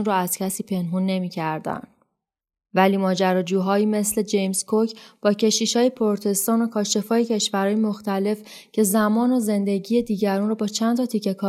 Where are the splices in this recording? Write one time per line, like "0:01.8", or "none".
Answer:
none